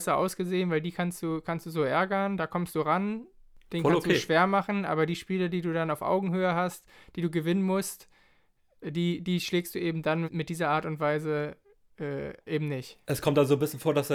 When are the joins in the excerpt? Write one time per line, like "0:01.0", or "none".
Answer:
0:10.2